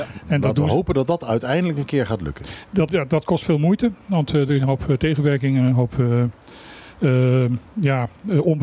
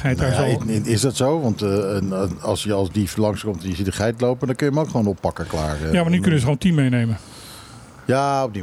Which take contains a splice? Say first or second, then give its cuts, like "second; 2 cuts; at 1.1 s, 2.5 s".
first; 1 cut; at 2.9 s